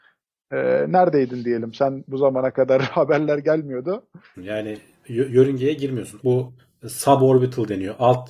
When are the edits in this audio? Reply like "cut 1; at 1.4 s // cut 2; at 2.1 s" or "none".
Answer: cut 1; at 4.4 s // cut 2; at 6.2 s